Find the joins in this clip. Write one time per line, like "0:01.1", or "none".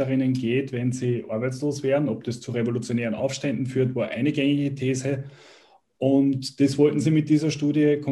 none

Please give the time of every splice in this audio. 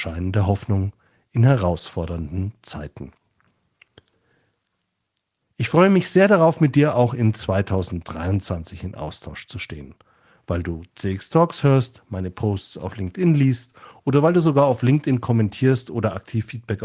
none

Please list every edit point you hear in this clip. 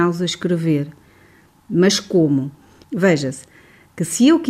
0:02.8

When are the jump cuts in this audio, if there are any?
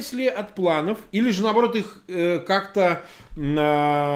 none

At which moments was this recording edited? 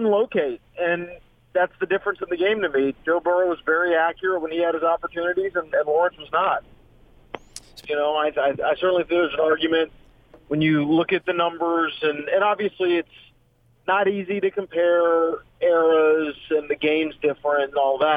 0:07.8
0:15.5

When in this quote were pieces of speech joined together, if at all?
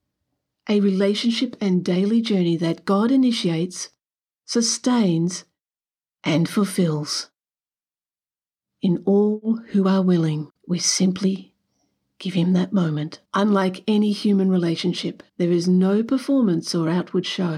0:10.6
0:13.3
0:15.3

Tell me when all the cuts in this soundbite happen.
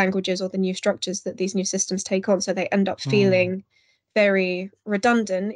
none

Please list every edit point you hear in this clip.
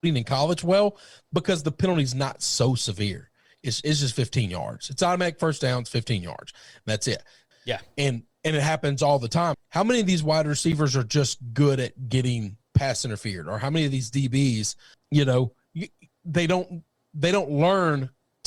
0:07.5
0:09.5
0:14.9

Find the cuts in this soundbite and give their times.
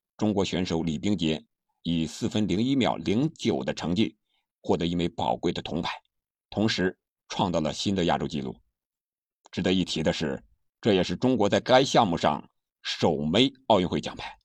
none

